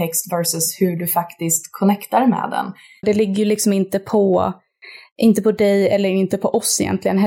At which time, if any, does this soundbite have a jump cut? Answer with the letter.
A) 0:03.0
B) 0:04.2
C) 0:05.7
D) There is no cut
A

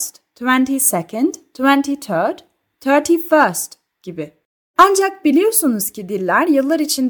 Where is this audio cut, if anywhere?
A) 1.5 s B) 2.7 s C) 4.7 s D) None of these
C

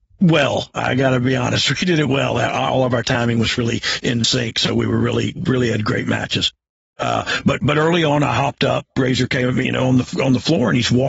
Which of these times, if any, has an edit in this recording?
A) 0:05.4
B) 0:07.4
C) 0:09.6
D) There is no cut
C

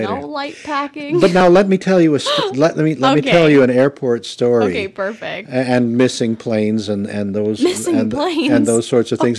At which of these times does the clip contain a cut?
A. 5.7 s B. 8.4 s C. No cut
C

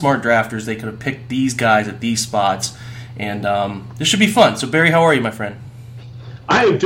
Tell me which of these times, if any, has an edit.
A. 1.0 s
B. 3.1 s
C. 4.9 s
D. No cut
D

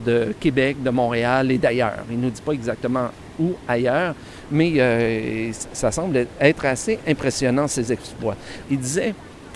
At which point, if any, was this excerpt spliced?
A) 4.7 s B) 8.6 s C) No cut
B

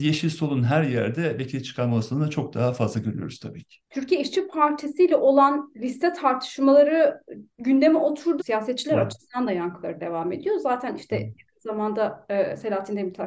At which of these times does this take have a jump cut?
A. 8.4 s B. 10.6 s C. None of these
A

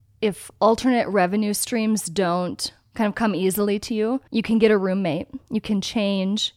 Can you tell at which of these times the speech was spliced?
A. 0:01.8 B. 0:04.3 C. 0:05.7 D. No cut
B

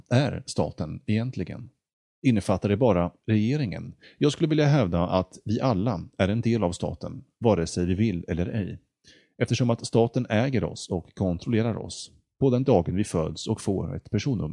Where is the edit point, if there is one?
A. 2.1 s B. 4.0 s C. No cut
B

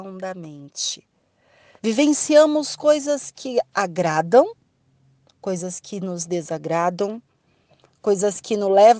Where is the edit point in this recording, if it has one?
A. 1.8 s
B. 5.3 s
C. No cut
A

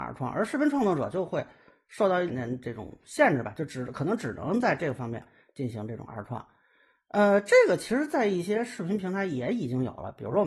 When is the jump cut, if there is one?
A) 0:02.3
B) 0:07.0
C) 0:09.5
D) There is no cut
A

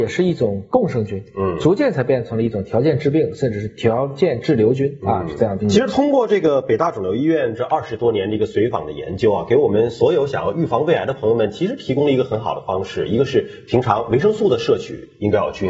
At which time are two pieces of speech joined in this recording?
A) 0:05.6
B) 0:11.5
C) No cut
A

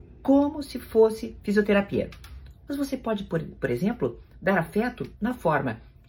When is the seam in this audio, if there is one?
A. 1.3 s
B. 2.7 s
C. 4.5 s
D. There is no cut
B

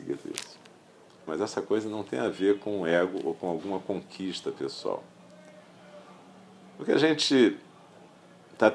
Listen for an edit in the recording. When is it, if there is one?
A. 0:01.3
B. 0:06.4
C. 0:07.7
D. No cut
A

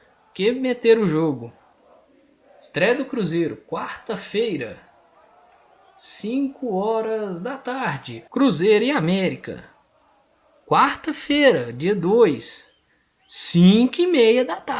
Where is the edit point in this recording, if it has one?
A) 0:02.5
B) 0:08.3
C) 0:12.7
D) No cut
B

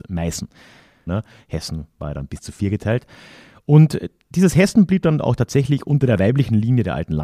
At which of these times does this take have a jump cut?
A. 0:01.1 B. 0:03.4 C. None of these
A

